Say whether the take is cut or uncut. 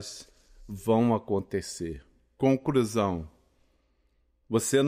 uncut